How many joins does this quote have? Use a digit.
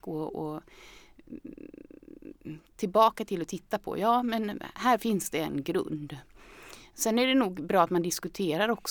1